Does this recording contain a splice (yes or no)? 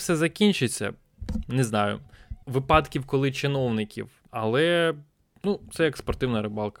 yes